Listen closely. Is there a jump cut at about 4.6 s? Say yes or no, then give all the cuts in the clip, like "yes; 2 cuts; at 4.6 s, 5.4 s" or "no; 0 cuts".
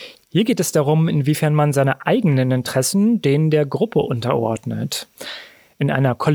no; 0 cuts